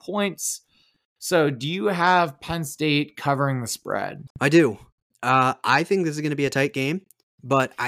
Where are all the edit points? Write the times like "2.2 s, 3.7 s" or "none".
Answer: 4.3 s